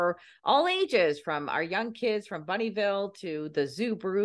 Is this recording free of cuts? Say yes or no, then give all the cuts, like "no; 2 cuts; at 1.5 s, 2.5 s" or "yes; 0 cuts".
yes; 0 cuts